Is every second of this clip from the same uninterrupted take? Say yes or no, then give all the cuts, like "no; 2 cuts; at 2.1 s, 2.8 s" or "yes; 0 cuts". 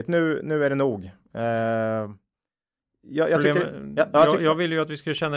no; 1 cut; at 1.2 s